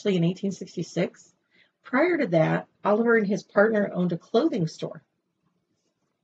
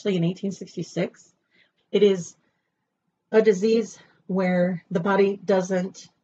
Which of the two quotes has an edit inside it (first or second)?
second